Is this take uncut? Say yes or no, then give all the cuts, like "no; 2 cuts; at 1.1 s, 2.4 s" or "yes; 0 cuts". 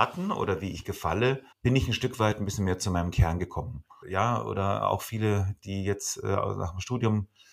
no; 2 cuts; at 1.5 s, 4.0 s